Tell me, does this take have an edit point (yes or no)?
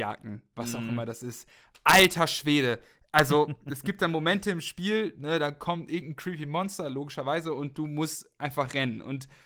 no